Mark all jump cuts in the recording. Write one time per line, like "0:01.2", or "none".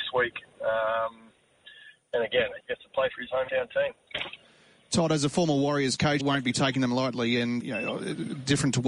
0:02.6
0:06.2
0:07.6